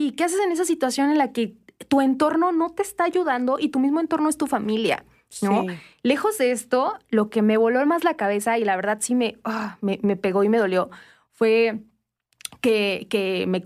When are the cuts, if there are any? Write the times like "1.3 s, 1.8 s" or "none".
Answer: none